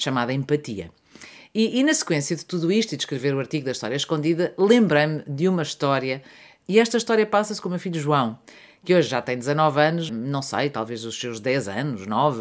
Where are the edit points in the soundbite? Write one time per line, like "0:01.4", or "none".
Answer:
0:06.6
0:10.1

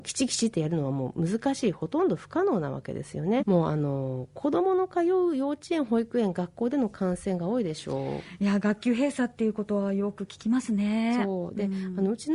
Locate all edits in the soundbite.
0:03.4

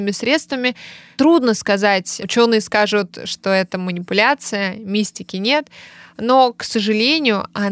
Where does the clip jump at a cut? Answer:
none

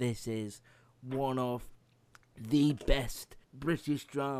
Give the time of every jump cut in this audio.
0:03.4

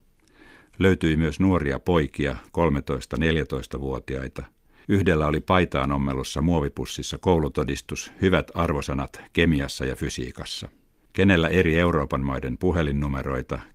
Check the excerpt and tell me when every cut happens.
0:04.8
0:11.1

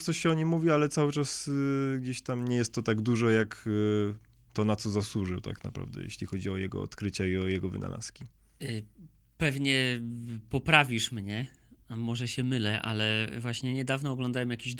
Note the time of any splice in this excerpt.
none

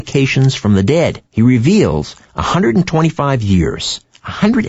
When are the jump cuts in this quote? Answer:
0:01.3

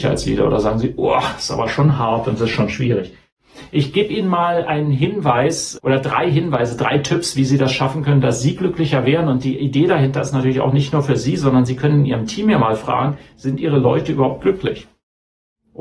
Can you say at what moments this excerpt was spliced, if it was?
0:05.8

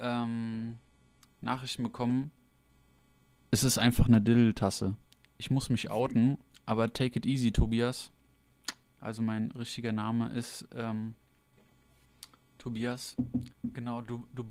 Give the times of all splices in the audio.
0:13.5

